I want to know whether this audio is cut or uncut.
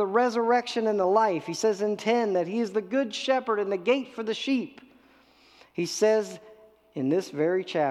uncut